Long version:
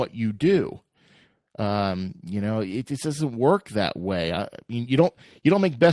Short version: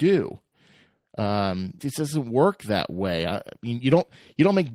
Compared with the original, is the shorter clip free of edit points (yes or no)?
no